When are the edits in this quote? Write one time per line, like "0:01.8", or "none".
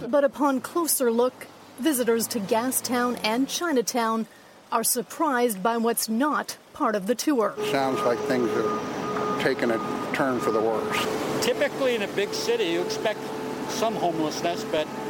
0:07.6